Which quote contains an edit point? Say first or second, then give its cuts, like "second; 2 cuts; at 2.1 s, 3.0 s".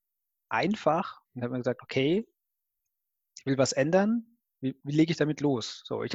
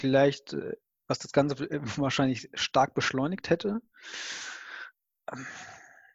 first; 2 cuts; at 1.3 s, 4.8 s